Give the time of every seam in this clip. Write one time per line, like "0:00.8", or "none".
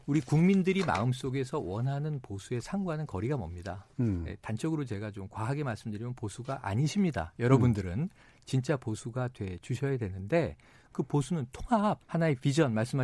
0:12.0